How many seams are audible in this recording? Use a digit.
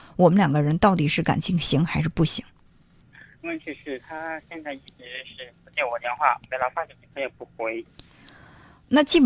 0